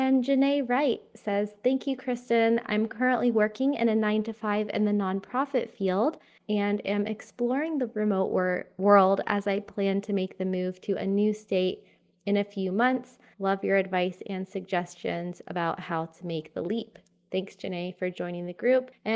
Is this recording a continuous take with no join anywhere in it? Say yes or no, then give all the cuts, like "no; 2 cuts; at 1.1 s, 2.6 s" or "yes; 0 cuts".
no; 1 cut; at 13.3 s